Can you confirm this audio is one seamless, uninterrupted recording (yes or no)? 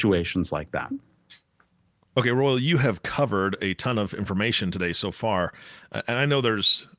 yes